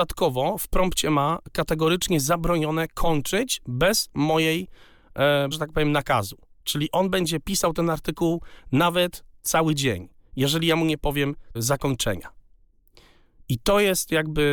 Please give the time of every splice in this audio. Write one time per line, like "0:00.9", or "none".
0:05.5
0:11.5